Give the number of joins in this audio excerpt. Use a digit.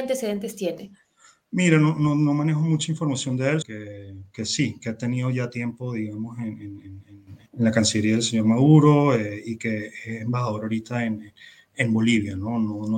2